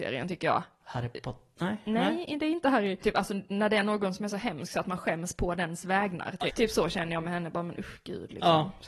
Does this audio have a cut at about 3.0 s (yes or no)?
yes